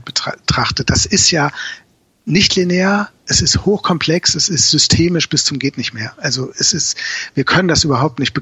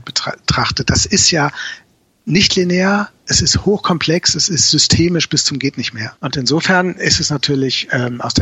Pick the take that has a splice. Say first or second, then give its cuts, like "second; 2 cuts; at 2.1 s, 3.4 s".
second; 1 cut; at 6.2 s